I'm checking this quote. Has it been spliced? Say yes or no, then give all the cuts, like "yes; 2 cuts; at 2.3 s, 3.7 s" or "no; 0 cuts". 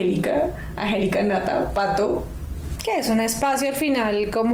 yes; 1 cut; at 2.8 s